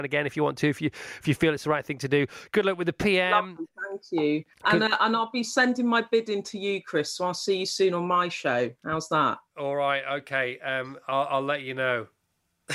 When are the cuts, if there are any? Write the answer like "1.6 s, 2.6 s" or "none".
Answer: none